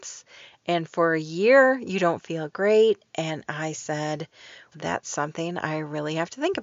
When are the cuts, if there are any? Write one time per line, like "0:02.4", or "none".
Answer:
0:04.7